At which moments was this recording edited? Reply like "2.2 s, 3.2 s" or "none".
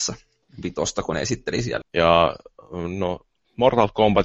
1.8 s